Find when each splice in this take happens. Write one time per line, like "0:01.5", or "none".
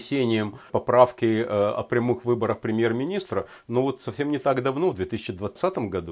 none